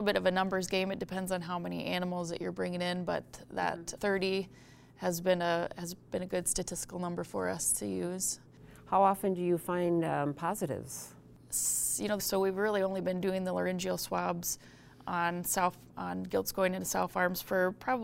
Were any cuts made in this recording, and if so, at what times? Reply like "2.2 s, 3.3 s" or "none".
4.0 s, 12.2 s